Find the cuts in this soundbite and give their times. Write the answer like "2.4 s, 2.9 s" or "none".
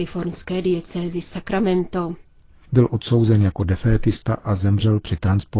2.5 s

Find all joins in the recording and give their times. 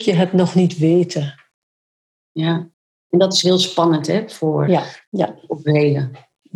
4.7 s

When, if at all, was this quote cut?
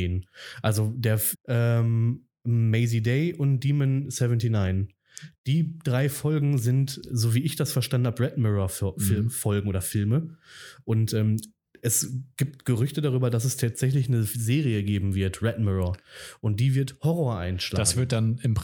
1.3 s, 7.0 s

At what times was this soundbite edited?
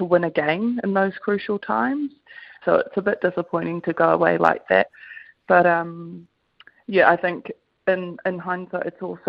2.6 s

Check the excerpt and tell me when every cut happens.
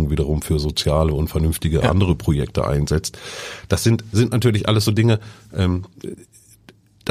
none

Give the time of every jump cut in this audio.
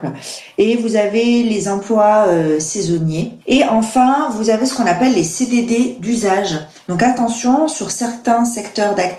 3.4 s

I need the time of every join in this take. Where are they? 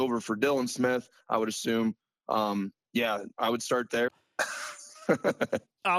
4.1 s

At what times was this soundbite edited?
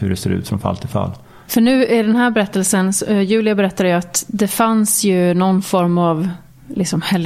1.4 s

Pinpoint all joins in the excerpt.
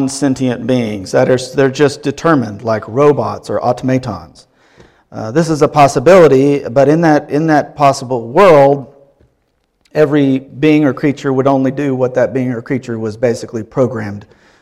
none

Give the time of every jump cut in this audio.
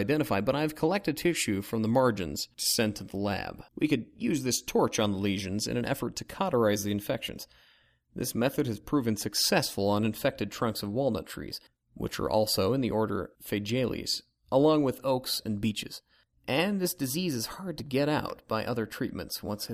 3.7 s

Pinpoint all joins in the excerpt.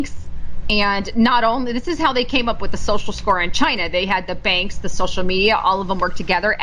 none

